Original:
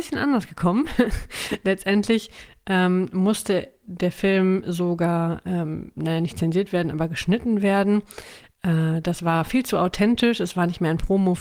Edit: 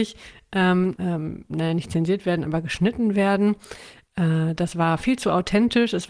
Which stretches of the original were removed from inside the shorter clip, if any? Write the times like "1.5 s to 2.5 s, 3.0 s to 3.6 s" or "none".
3.1 s to 5.4 s